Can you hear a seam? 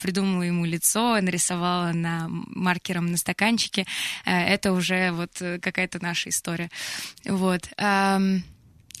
no; 0 cuts

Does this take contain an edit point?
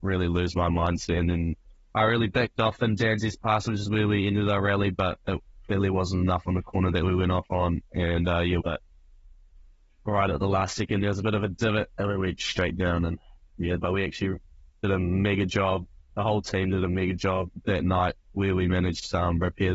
yes; 2 cuts; at 8.6 s, 13.8 s

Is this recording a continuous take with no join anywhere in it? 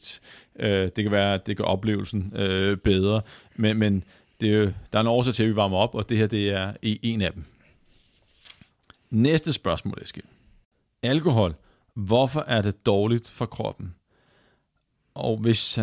yes; 0 cuts

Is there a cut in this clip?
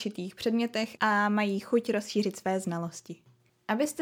no; 0 cuts

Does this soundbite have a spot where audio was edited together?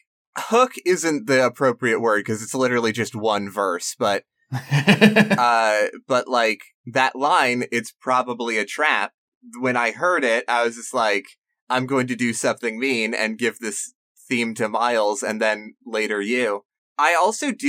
no; 0 cuts

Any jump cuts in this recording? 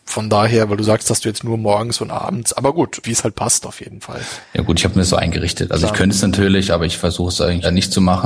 no; 0 cuts

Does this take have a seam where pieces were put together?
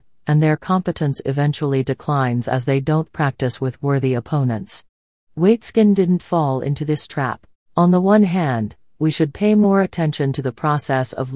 yes; 1 cut; at 7.6 s

